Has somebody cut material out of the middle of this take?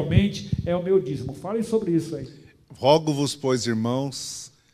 no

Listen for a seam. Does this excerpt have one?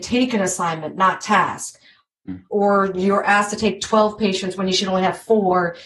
yes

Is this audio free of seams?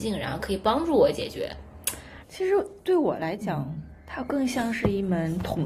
no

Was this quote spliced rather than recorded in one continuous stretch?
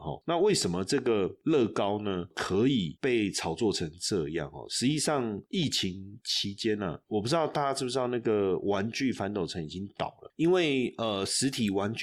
no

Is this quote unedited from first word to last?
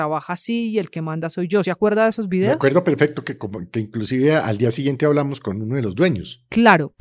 yes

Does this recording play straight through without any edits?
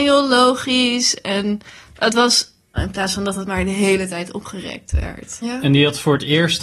no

